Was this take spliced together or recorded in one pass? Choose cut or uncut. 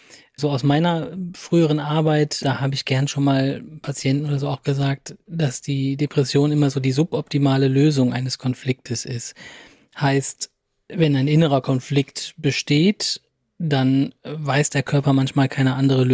uncut